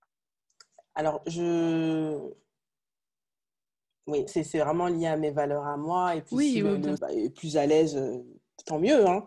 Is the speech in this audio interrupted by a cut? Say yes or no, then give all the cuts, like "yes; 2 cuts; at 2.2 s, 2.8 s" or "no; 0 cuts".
yes; 3 cuts; at 1.2 s, 4.3 s, 7.0 s